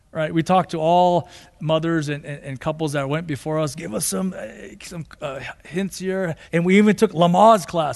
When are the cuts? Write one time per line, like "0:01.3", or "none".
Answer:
0:01.6
0:06.5